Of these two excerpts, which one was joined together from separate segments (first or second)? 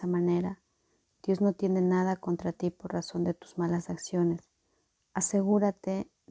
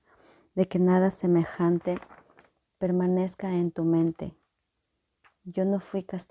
first